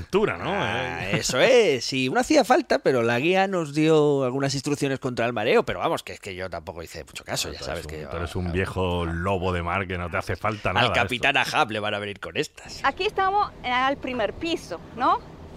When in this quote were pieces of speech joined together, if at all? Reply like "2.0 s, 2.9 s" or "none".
2.1 s